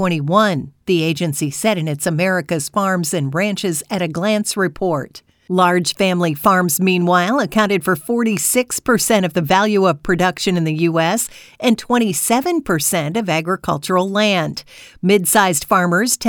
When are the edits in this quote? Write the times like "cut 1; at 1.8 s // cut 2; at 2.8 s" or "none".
none